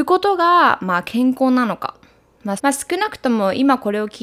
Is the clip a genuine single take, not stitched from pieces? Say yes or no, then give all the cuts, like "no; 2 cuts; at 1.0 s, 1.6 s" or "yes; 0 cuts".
no; 1 cut; at 2.6 s